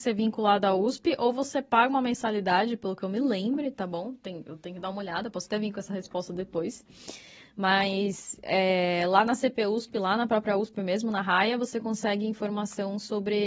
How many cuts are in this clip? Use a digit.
0